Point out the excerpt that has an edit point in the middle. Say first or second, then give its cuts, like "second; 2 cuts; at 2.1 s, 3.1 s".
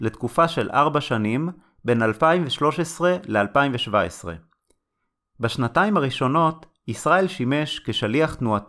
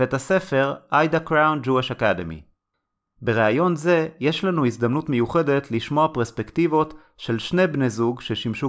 second; 1 cut; at 3.0 s